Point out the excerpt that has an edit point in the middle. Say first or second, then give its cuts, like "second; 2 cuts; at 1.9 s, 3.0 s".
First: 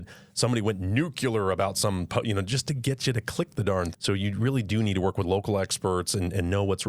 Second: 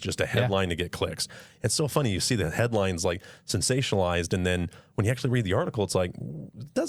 first; 1 cut; at 3.9 s